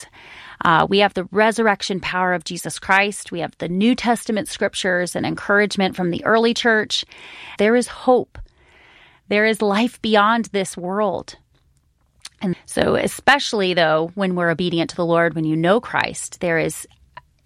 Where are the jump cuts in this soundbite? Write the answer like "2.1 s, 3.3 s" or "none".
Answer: 7.6 s, 12.5 s